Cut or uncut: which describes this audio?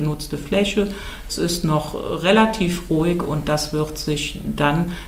uncut